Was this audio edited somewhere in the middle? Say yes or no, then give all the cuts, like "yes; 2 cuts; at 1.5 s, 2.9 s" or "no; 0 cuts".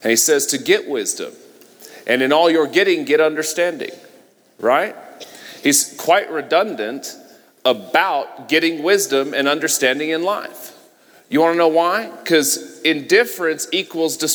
no; 0 cuts